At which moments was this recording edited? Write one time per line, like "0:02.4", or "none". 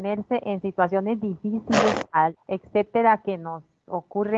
0:02.4